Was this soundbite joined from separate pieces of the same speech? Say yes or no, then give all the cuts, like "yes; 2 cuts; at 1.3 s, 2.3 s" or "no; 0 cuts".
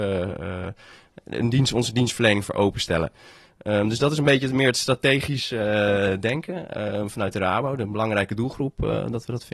no; 0 cuts